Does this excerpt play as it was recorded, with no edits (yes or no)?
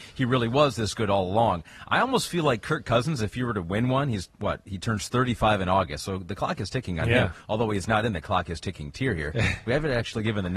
yes